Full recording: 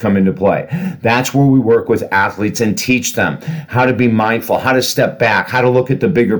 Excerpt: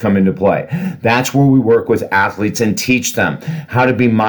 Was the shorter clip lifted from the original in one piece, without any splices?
yes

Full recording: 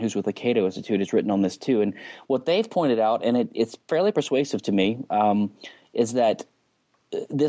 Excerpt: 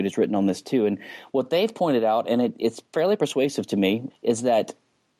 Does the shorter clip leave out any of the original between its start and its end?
yes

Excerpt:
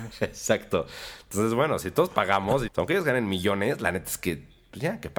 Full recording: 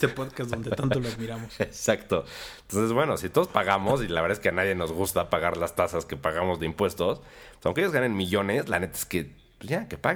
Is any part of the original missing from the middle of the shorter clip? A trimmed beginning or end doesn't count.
yes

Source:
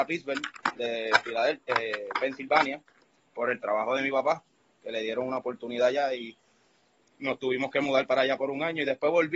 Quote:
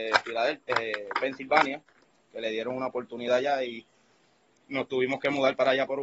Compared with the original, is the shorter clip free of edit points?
no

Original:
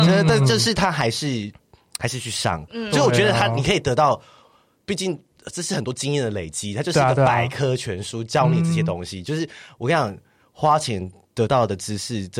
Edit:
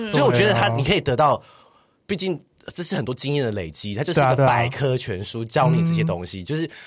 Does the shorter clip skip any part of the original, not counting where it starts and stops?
no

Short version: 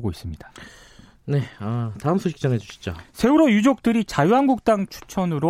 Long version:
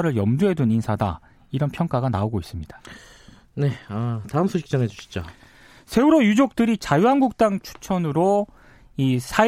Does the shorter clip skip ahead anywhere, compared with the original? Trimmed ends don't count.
yes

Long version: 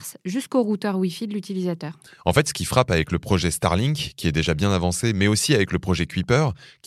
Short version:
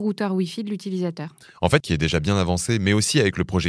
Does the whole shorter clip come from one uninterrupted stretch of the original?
no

